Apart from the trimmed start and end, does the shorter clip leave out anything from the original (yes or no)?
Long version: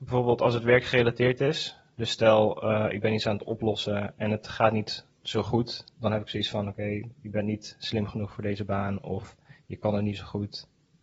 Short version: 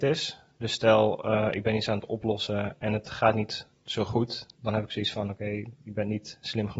no